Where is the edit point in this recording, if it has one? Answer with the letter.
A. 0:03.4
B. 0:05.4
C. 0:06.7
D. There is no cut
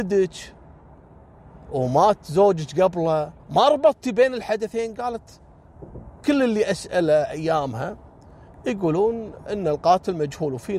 A